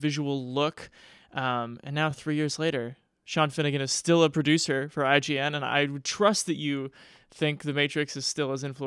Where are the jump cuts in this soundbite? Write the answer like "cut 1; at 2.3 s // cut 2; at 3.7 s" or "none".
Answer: none